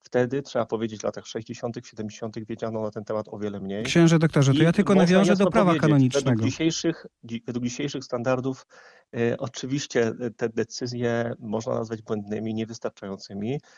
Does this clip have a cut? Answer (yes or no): no